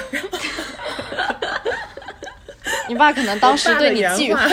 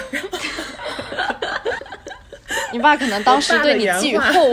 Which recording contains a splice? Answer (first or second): second